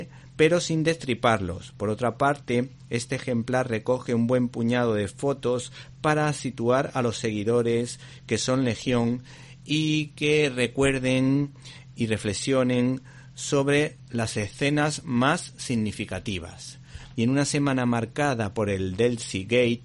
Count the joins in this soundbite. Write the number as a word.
one